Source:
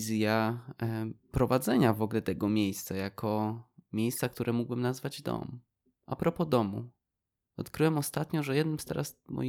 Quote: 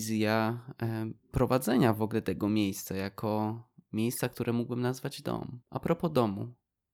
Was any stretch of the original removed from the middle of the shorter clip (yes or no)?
yes